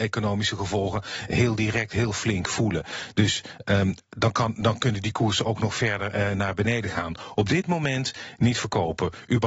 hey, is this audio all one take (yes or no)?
yes